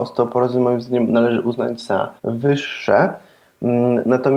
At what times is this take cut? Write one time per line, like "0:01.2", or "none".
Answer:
0:02.2